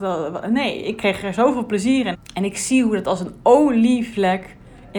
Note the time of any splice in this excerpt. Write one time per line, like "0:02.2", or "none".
0:02.1